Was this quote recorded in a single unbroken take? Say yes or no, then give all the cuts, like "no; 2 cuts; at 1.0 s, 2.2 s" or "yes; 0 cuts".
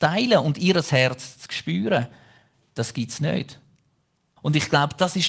no; 1 cut; at 4.4 s